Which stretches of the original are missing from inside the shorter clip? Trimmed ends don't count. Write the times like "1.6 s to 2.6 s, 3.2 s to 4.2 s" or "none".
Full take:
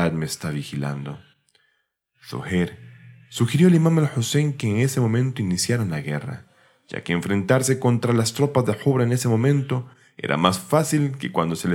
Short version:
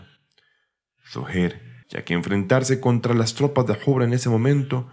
3.0 s to 6.8 s